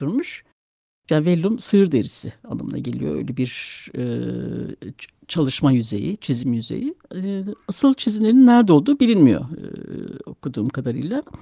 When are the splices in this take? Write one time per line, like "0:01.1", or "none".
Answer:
0:01.1